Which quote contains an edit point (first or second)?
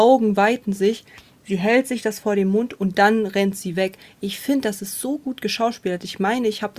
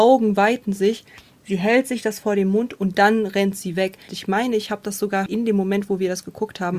second